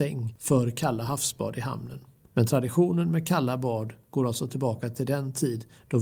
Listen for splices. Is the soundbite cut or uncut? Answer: cut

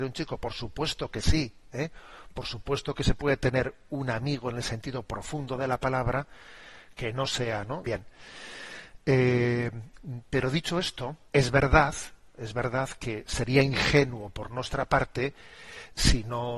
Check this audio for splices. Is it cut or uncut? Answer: cut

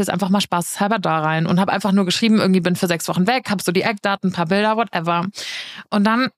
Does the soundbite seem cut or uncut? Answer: uncut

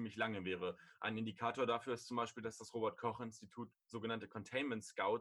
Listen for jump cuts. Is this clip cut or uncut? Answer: uncut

